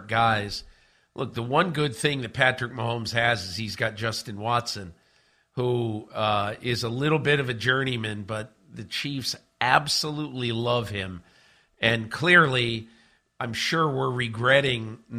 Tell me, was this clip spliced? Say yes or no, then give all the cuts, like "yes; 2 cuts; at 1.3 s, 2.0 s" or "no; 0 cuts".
no; 0 cuts